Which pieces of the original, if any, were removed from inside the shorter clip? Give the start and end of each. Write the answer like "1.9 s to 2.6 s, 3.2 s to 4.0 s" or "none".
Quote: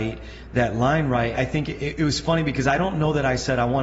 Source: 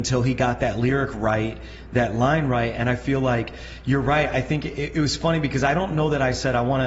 2.7 s to 4.3 s